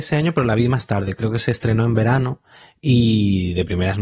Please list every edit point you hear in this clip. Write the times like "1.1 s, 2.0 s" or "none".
none